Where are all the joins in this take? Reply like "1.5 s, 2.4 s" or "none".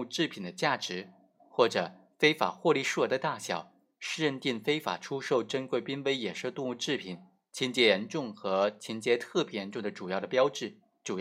none

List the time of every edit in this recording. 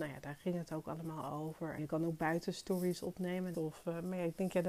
1.8 s, 3.5 s

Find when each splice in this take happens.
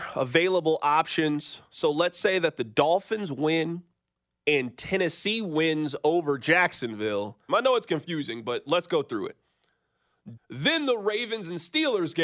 7.5 s, 10.4 s

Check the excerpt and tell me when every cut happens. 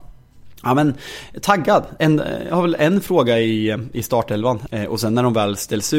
4.7 s

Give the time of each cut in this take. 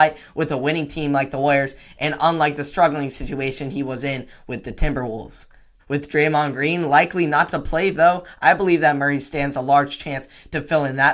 5.8 s

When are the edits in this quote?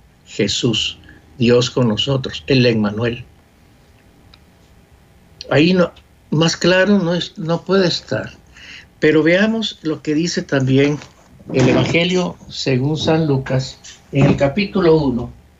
none

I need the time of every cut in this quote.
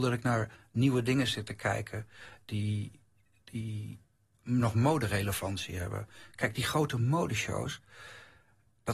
none

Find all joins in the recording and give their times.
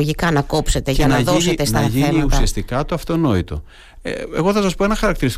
none

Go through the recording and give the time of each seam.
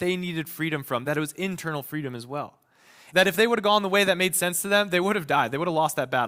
1.0 s, 3.1 s

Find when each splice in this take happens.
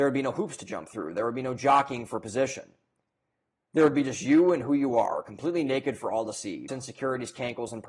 6.7 s

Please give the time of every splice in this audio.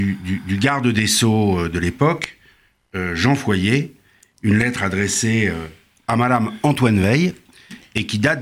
none

